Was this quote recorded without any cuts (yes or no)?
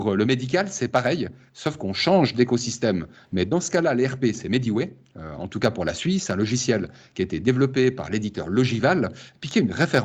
yes